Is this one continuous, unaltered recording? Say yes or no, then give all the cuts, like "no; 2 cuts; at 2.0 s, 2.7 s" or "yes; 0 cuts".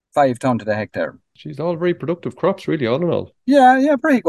yes; 0 cuts